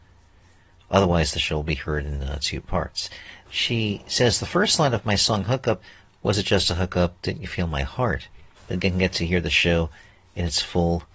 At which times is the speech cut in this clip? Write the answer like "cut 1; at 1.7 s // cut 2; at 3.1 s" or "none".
cut 1; at 3.4 s // cut 2; at 8.6 s